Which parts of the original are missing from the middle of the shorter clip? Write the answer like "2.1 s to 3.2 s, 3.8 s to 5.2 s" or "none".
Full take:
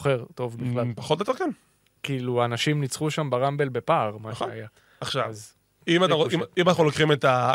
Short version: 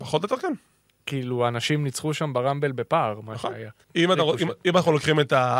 4.8 s to 5.8 s